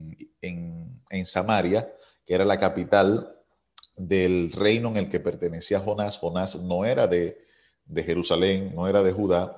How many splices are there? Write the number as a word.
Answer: zero